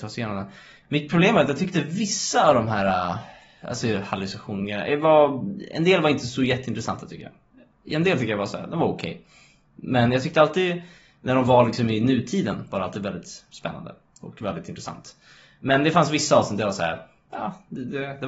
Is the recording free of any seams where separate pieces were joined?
yes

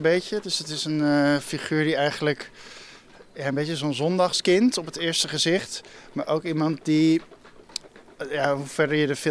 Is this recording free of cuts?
yes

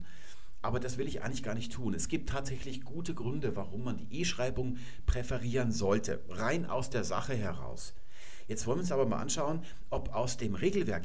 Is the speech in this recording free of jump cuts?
yes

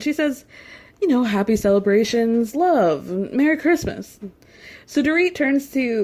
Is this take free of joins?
yes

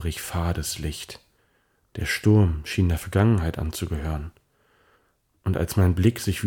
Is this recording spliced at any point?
no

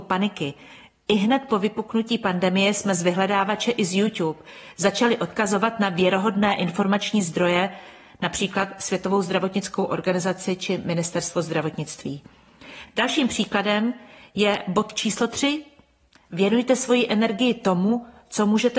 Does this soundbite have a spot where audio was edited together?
no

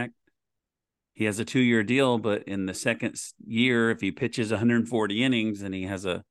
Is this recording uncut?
yes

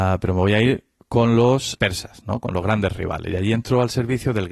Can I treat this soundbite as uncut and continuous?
no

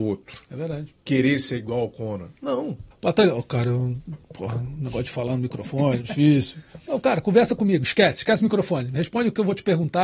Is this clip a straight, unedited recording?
no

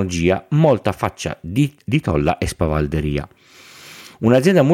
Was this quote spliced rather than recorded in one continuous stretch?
yes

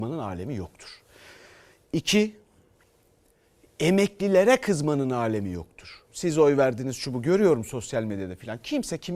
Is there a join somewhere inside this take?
no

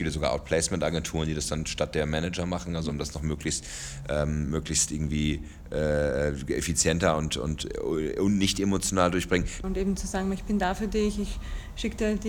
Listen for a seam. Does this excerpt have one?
yes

